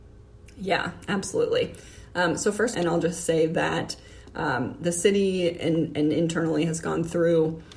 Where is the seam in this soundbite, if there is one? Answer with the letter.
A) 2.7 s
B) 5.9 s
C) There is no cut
A